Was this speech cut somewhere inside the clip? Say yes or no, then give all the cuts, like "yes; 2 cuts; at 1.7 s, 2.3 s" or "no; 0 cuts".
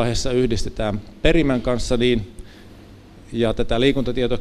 no; 0 cuts